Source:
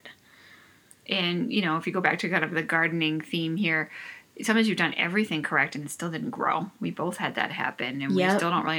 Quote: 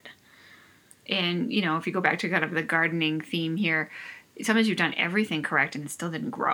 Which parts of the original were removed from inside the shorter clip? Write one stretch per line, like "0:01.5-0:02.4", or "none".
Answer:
none